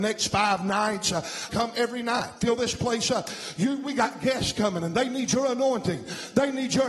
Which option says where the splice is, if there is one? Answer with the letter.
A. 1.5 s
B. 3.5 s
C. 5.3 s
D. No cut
A